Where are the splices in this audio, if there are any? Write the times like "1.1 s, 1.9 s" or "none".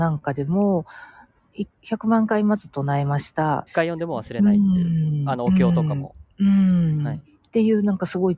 1.7 s, 3.7 s, 6.3 s